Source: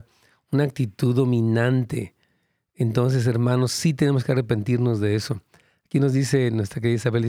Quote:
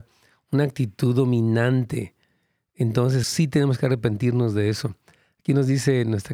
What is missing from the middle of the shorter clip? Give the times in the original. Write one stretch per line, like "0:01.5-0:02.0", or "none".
0:03.2-0:03.7